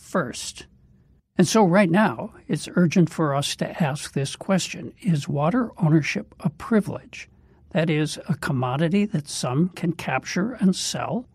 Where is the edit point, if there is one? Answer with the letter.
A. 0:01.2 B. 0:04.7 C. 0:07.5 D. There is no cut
A